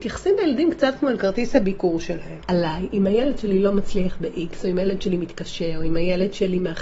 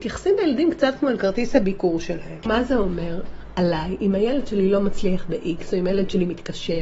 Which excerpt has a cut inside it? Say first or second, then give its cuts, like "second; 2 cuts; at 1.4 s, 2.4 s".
first; 1 cut; at 2.4 s